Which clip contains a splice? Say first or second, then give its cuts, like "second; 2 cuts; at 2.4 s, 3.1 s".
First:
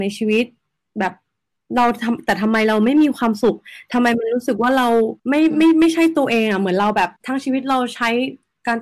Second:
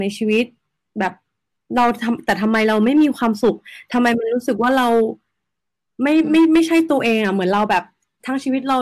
first; 2 cuts; at 5.2 s, 7.2 s